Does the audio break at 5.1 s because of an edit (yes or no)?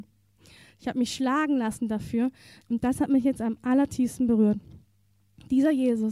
no